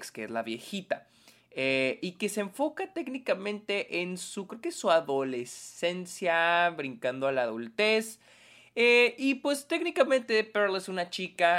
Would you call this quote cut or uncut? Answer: uncut